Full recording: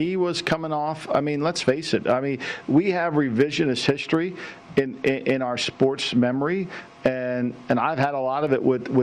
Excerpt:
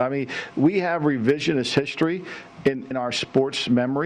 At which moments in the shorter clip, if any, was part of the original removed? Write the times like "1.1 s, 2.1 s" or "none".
2.9 s